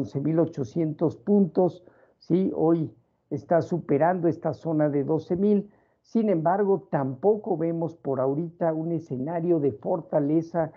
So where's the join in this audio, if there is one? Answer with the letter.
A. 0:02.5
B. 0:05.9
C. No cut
C